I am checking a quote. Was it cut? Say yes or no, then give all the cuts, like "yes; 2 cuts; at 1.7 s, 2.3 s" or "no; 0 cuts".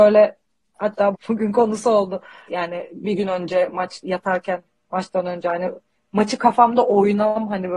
yes; 2 cuts; at 1.1 s, 2.5 s